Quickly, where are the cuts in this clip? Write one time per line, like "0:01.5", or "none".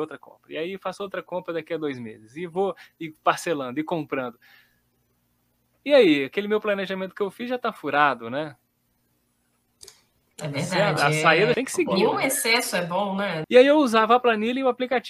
0:11.5
0:13.4